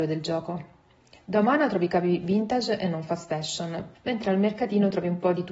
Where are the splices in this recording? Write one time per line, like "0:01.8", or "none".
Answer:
0:03.9

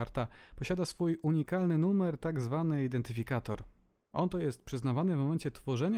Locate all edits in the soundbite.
none

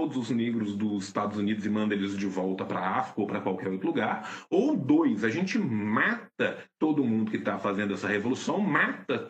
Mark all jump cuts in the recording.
none

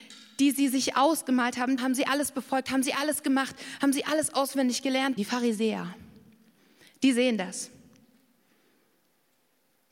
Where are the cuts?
0:01.8
0:05.2

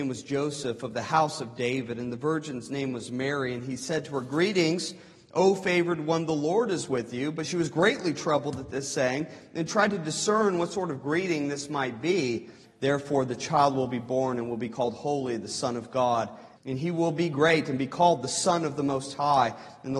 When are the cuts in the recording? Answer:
0:12.6
0:16.6

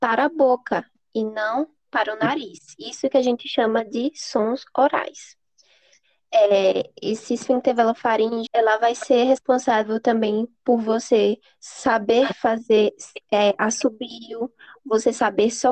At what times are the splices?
0:08.5

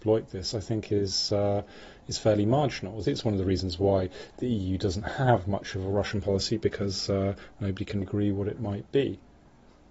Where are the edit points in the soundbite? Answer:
0:03.0
0:08.0

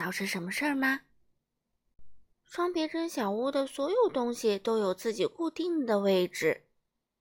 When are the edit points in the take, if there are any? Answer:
0:02.3

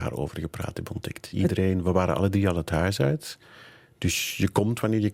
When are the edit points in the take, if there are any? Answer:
none

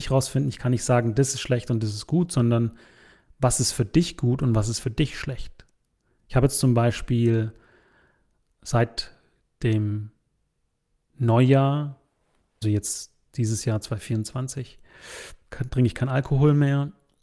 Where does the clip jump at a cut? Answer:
0:12.6

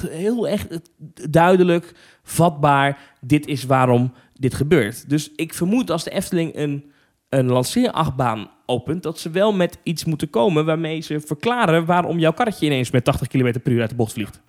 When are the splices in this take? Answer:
none

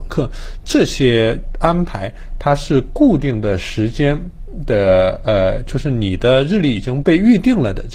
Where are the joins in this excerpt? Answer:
0:07.0

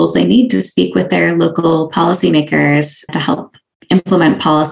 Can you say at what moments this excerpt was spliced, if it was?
0:03.1

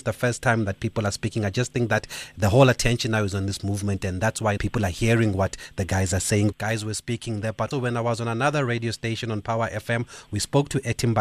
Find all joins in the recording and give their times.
0:04.6
0:06.5
0:07.7

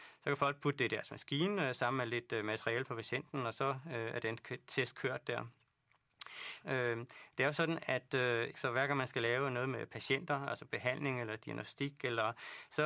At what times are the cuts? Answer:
0:06.6
0:08.5

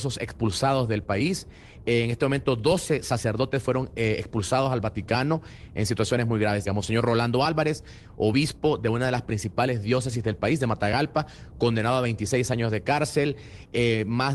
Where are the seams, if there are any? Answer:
0:06.7

